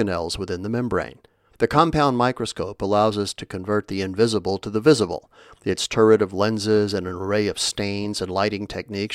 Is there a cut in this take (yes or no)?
yes